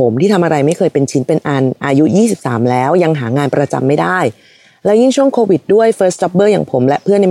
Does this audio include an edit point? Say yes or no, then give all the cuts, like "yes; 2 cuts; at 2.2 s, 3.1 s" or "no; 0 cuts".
no; 0 cuts